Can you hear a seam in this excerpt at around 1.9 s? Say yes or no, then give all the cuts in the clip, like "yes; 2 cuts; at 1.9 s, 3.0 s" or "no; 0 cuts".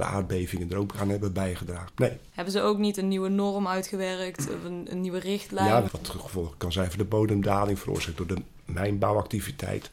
yes; 2 cuts; at 1.9 s, 5.9 s